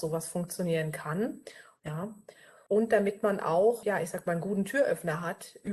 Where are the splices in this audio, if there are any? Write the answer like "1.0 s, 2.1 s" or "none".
1.8 s